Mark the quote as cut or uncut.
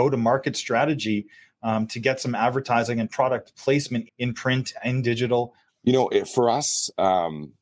cut